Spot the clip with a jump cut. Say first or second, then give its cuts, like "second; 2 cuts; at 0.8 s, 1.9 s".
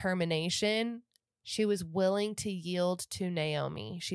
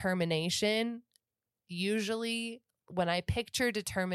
first; 1 cut; at 1.3 s